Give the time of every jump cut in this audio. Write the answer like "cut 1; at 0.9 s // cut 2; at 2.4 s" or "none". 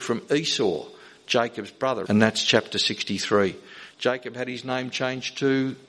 cut 1; at 2.0 s // cut 2; at 3.9 s